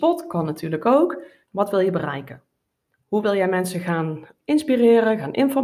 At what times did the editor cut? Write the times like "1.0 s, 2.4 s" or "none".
1.4 s